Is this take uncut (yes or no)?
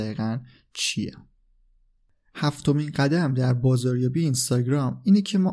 yes